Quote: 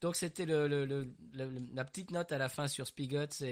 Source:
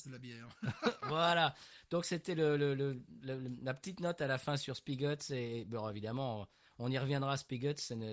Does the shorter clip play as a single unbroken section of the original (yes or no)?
yes